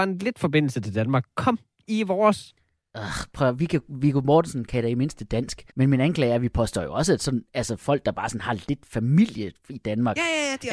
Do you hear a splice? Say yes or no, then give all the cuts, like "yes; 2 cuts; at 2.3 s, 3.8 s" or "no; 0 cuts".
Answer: yes; 1 cut; at 5.7 s